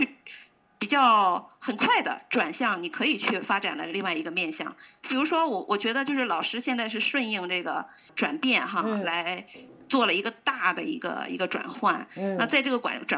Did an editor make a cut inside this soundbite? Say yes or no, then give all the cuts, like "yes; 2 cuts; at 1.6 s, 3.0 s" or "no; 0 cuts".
no; 0 cuts